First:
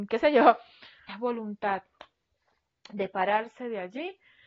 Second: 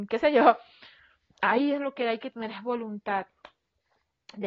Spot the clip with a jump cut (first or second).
first